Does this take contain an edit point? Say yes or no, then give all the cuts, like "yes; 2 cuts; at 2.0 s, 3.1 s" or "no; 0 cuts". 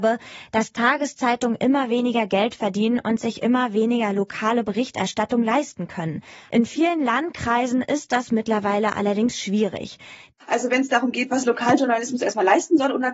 yes; 2 cuts; at 6.5 s, 10.3 s